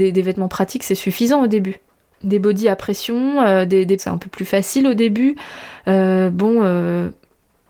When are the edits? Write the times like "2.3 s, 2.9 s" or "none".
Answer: 4.0 s